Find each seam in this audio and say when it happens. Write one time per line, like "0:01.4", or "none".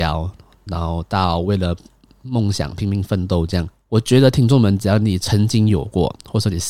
none